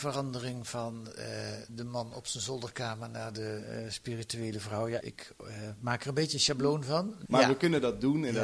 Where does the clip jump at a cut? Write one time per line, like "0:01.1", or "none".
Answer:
0:05.0
0:07.3